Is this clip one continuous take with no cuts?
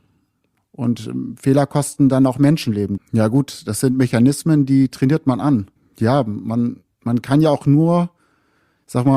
no; 2 cuts; at 3.0 s, 5.8 s

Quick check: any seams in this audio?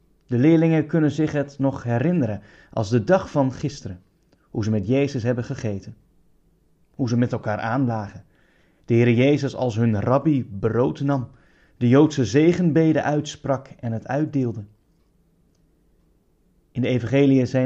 no; 0 cuts

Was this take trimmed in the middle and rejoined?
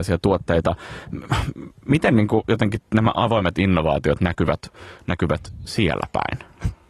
no; 0 cuts

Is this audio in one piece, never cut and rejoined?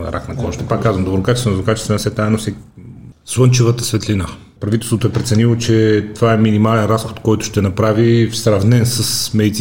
no; 2 cuts; at 3.1 s, 4.6 s

